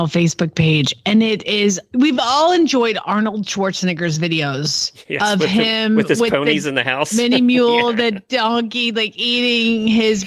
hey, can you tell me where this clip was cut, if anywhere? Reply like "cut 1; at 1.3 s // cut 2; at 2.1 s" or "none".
none